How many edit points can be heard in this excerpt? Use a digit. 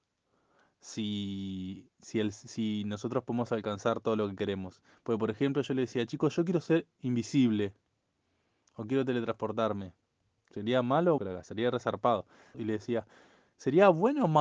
2